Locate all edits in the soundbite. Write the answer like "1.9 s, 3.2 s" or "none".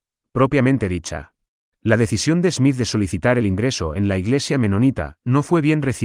1.7 s